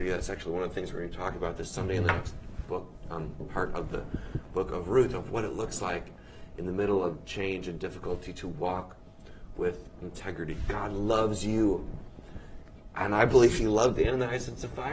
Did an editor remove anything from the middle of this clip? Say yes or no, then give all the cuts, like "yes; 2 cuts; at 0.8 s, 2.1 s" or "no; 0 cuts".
no; 0 cuts